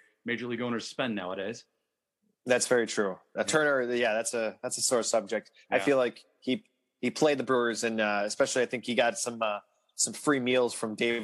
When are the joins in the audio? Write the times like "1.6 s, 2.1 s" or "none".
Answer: none

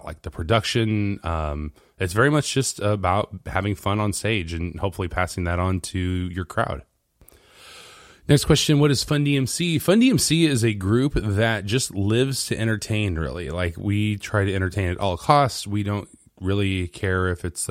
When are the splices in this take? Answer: none

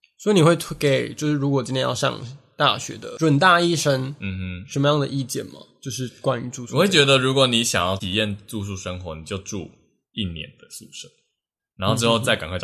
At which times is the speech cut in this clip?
none

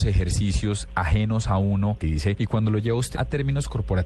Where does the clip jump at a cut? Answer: 2.0 s, 3.1 s

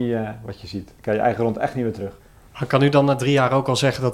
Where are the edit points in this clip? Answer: none

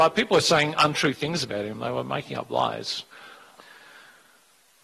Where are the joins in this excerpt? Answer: 3.6 s

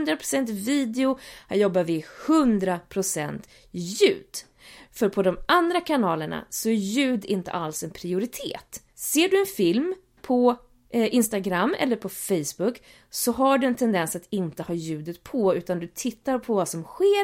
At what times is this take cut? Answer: 8.9 s

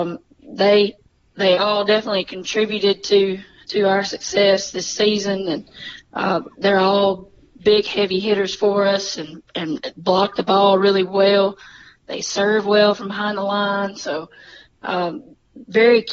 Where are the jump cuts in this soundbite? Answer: none

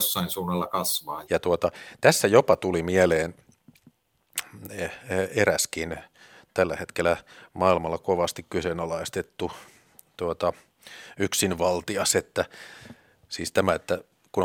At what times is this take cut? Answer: 1.2 s

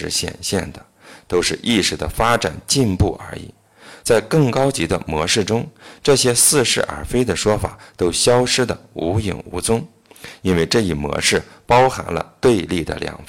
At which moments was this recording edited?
none

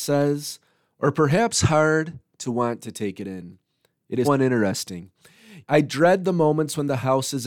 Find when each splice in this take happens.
4.2 s, 5.6 s

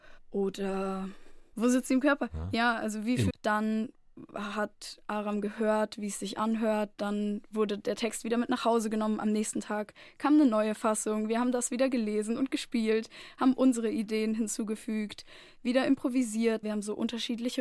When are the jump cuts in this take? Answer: 3.3 s, 16.6 s

